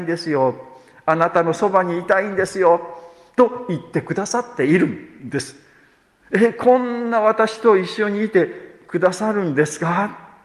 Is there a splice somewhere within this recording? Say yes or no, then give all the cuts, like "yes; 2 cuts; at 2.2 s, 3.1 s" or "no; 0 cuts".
no; 0 cuts